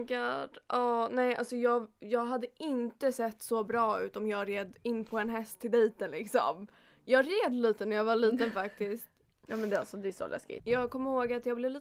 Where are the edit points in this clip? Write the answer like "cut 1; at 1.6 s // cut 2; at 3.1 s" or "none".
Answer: cut 1; at 9.3 s // cut 2; at 10.6 s